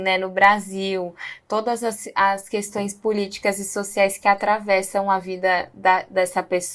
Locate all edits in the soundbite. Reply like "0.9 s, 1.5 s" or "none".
none